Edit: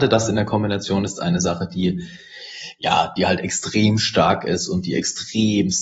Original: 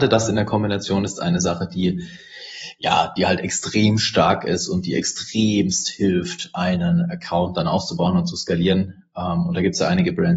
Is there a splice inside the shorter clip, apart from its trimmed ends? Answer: no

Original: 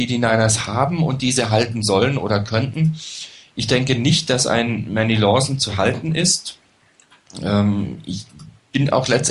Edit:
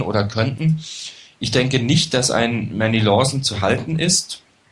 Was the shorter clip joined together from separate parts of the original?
no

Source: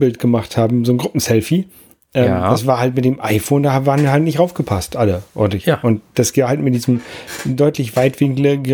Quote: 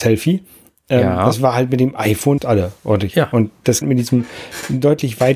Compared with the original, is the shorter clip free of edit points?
no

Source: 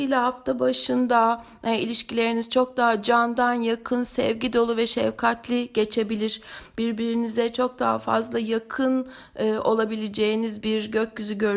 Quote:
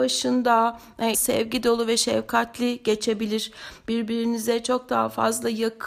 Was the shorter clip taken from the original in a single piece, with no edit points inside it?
no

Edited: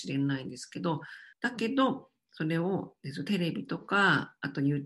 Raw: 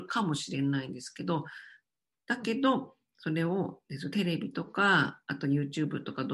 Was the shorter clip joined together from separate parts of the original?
yes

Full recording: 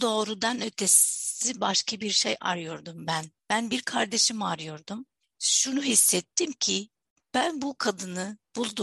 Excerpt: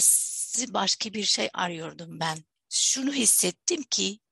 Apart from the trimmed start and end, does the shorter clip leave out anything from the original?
yes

